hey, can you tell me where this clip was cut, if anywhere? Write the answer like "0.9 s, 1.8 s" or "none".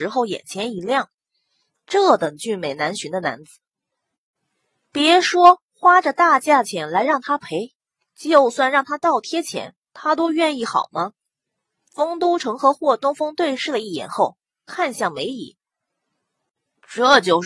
none